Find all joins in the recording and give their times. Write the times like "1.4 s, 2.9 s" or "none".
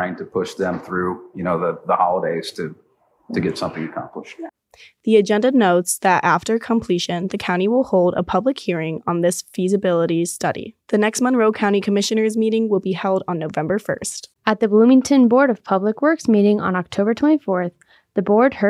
14.3 s